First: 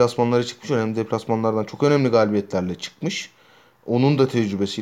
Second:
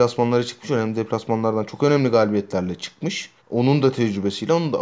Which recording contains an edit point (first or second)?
second